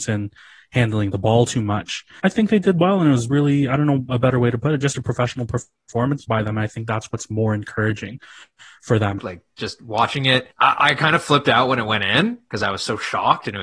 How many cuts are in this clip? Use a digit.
2